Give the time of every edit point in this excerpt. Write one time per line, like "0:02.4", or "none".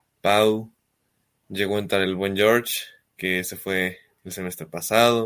none